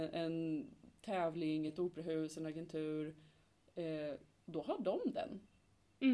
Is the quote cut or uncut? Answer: uncut